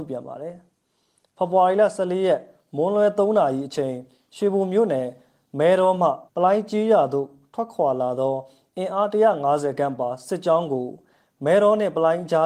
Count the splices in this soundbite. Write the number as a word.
one